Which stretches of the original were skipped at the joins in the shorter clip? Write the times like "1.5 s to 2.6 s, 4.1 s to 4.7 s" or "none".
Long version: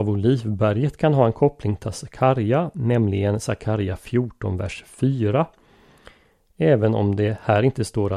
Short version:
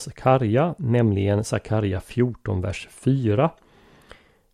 none